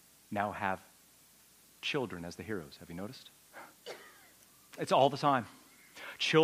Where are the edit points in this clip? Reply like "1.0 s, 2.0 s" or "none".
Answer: none